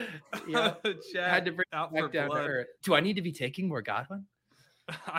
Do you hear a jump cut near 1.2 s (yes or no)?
no